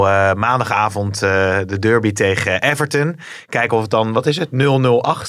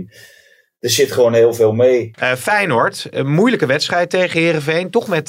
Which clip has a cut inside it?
second; 1 cut; at 2.1 s

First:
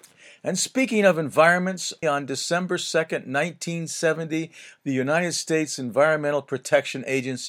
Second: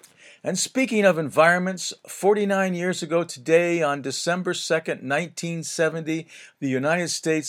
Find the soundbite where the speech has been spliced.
first; 1 cut; at 2.0 s

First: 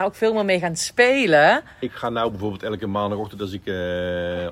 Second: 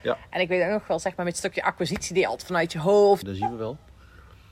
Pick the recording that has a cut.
second; 1 cut; at 3.2 s

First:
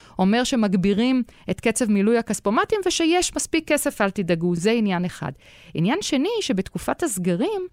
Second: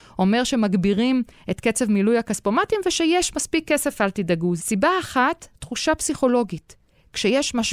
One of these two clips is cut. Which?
second; 1 cut; at 4.6 s

